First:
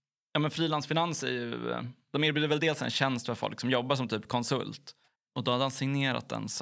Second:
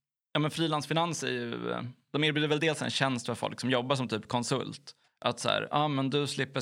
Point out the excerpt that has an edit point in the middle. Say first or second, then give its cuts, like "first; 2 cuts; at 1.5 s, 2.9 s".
first; 1 cut; at 5.2 s